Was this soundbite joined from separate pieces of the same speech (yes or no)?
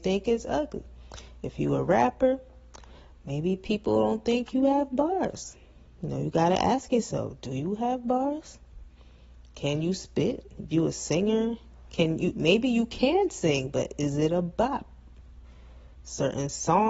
no